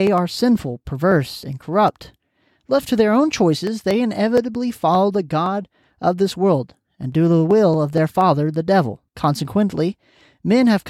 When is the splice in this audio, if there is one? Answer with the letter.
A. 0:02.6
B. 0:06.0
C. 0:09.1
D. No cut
C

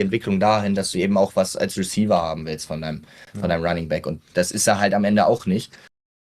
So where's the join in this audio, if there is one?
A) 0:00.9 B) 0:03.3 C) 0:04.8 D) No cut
D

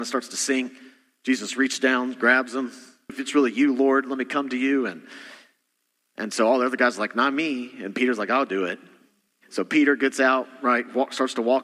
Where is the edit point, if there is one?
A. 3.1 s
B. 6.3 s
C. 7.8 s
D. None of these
A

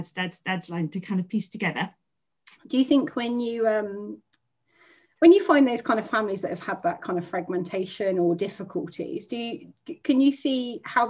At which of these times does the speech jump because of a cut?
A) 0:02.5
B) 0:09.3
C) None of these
A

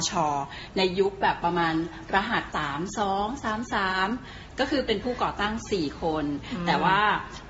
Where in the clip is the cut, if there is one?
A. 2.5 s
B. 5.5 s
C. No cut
A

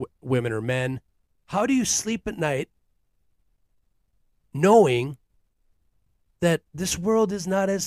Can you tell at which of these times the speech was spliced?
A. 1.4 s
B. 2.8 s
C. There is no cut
A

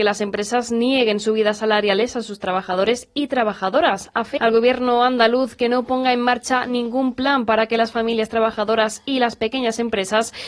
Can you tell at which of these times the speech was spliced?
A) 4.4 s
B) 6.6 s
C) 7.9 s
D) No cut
A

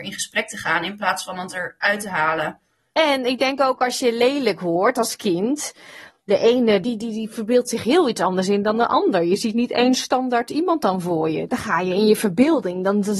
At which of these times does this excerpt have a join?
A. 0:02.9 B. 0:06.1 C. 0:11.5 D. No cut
D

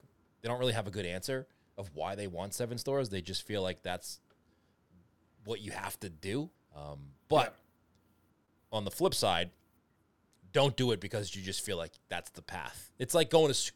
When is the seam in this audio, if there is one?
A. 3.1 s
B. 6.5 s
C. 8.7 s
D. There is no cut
B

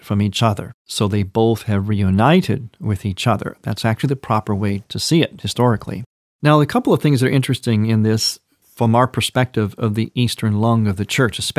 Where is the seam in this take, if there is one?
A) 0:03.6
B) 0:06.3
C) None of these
B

